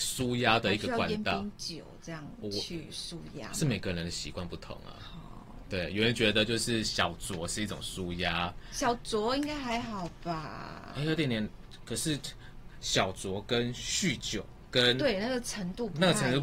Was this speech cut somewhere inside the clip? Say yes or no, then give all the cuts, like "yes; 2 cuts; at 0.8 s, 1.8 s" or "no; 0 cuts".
yes; 1 cut; at 10.9 s